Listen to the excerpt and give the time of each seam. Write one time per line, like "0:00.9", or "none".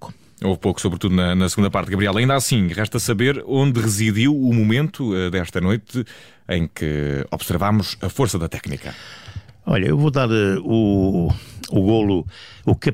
none